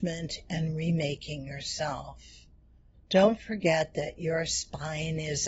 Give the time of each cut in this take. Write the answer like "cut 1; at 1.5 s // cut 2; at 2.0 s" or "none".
cut 1; at 2.9 s